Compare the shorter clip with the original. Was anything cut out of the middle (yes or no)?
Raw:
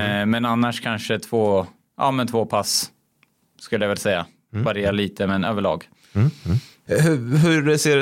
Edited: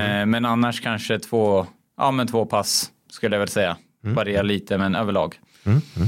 yes